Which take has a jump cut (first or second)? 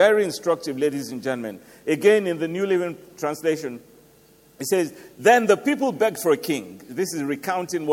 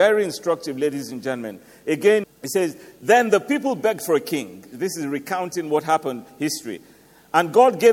second